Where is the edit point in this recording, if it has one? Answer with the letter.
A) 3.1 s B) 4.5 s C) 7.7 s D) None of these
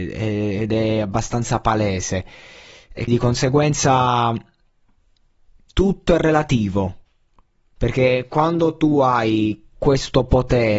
A